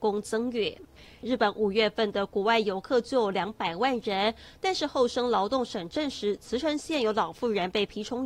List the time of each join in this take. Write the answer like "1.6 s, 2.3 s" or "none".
1.2 s